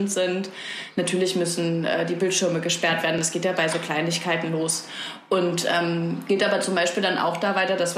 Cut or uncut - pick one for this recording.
uncut